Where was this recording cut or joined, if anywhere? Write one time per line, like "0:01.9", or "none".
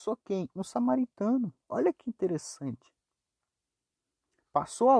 none

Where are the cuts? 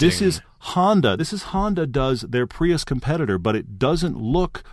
none

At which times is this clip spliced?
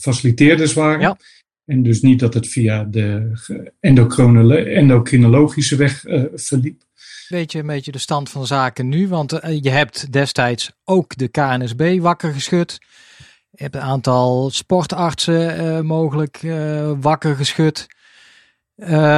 0:07.3

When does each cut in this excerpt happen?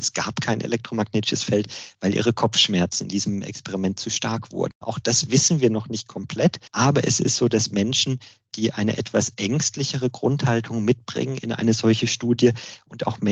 0:04.7
0:06.7

